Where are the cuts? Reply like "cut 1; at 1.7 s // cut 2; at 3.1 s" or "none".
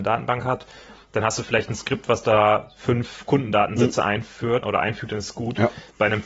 cut 1; at 4.6 s

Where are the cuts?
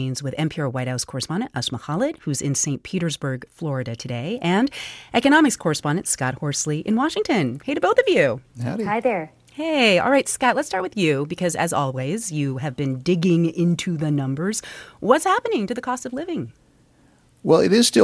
cut 1; at 8.5 s

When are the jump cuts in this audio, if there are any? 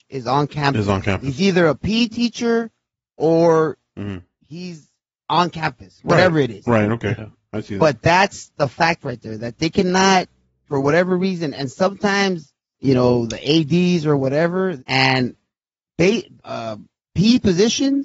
cut 1; at 12.7 s // cut 2; at 14.8 s // cut 3; at 16.4 s

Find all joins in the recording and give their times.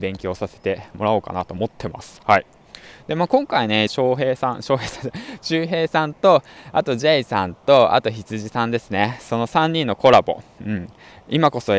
cut 1; at 3.9 s

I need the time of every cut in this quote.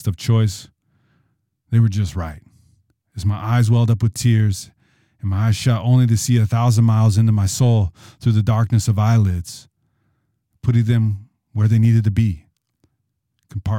cut 1; at 10.5 s

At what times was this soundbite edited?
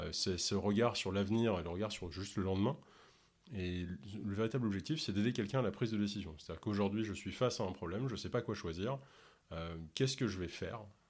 none

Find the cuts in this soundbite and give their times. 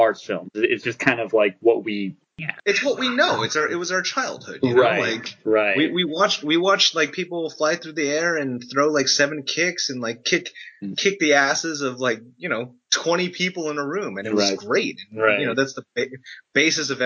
none

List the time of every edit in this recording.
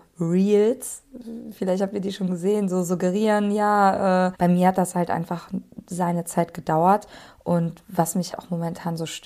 cut 1; at 4.3 s // cut 2; at 8.3 s

